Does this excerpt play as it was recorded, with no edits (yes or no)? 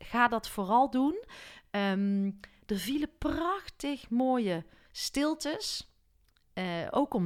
yes